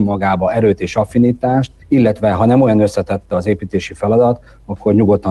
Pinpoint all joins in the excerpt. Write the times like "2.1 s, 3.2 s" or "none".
1.8 s